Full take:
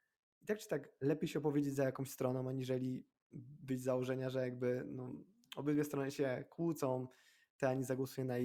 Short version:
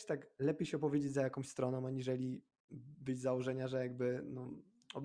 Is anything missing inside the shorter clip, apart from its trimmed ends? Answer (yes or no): no